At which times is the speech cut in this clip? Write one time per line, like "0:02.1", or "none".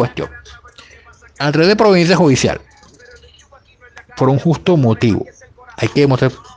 none